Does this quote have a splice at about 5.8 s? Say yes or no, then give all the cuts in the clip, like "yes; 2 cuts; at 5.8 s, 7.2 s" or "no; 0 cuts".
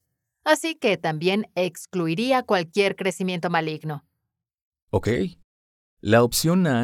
yes; 1 cut; at 5.8 s